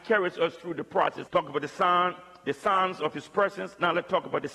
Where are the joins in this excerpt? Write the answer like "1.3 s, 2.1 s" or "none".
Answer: 1.3 s